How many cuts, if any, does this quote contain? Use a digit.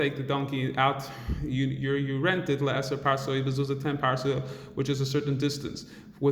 0